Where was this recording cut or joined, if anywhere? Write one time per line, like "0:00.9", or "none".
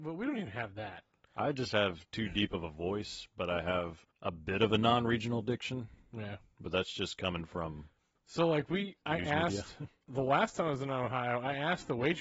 0:04.1